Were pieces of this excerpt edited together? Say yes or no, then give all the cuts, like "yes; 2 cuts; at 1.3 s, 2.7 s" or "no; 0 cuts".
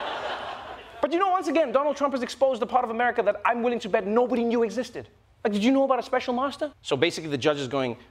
yes; 2 cuts; at 5.2 s, 6.7 s